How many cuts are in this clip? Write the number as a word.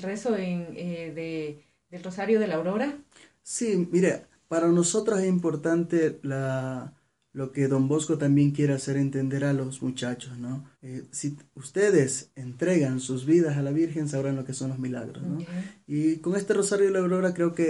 one